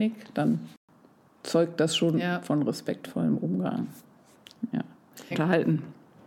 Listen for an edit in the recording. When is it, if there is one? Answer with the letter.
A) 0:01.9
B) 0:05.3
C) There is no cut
B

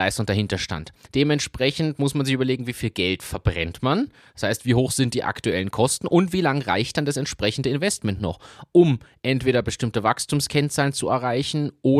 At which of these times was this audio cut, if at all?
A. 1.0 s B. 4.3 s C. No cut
A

